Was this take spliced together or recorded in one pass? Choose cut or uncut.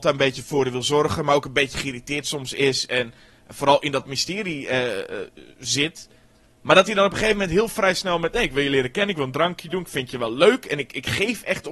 uncut